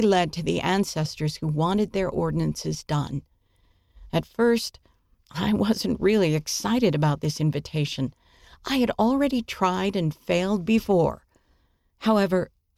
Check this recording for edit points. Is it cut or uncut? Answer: uncut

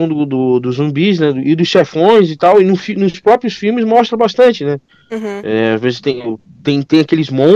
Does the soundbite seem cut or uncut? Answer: uncut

